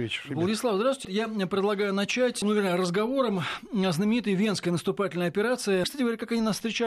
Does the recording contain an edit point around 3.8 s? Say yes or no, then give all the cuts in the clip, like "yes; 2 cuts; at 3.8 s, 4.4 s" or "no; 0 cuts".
no; 3 cuts; at 1.0 s, 2.4 s, 5.8 s